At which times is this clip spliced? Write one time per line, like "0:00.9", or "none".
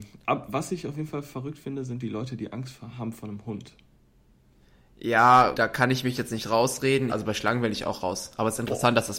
0:05.5
0:07.1